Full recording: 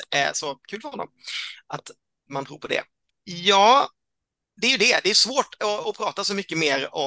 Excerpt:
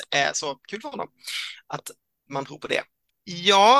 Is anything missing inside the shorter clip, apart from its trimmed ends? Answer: no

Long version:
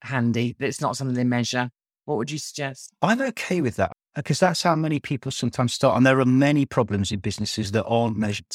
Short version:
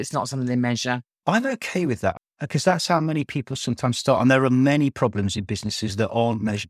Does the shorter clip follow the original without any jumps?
no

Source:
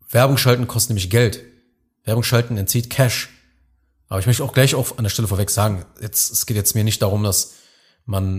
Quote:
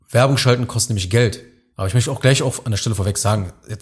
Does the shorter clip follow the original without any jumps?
no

